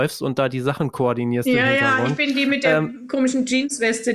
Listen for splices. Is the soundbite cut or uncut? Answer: uncut